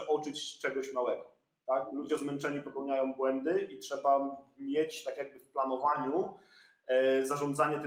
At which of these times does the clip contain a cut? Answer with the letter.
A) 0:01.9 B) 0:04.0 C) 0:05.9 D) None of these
D